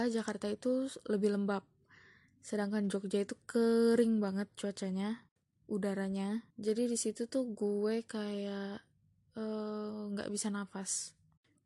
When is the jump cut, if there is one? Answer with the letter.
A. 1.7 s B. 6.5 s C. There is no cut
B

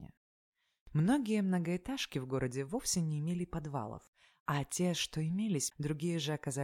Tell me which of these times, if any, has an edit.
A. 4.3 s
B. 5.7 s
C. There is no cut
B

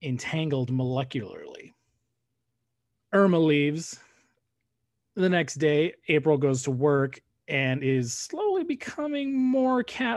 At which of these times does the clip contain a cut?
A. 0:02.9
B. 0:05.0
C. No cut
A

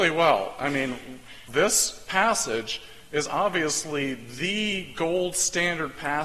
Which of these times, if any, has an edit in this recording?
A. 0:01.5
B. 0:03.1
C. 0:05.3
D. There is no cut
A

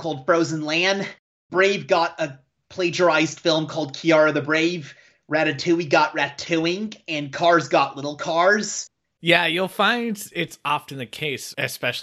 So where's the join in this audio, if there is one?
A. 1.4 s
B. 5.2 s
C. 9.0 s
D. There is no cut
C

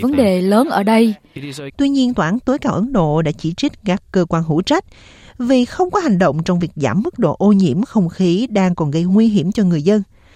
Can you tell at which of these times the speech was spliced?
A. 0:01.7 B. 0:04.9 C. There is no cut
A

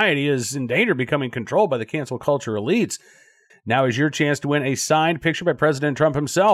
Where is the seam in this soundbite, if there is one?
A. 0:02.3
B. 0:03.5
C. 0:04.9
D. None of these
B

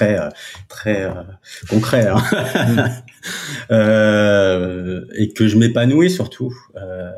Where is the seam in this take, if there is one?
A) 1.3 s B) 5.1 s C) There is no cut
C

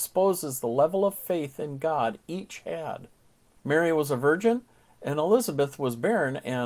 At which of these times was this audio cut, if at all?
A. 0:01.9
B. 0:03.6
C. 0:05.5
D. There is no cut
B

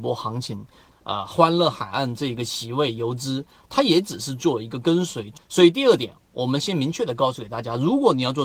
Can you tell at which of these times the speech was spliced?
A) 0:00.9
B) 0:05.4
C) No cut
A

